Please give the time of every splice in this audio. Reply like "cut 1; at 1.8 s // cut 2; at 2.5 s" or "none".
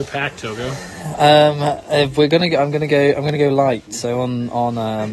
none